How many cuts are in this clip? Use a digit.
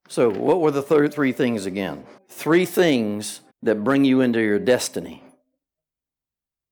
2